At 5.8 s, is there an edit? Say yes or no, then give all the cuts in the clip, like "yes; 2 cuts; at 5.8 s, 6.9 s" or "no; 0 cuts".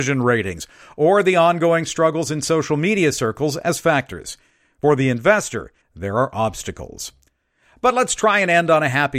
yes; 1 cut; at 5.8 s